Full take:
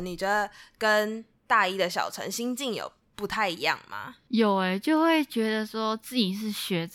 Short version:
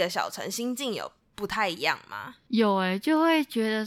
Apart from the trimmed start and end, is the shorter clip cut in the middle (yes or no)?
no